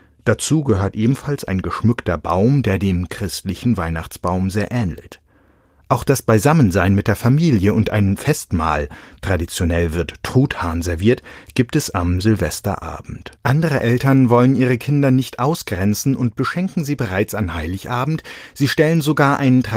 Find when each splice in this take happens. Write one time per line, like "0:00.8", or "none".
0:13.4